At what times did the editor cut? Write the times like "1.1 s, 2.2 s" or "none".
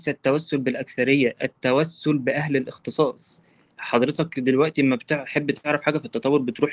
none